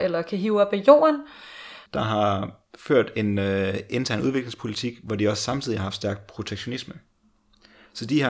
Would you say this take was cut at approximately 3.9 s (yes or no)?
no